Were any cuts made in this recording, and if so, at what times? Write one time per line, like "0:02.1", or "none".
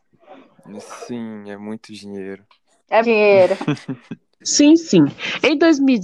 0:03.0
0:04.4